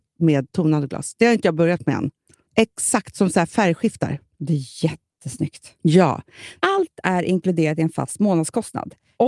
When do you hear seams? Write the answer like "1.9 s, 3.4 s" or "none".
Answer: 2.5 s